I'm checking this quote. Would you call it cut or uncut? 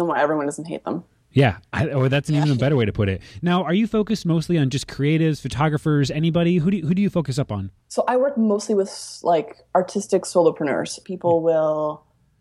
cut